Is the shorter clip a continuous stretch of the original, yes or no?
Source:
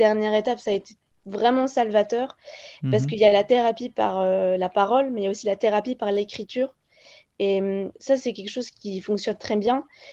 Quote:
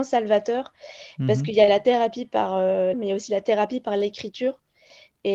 no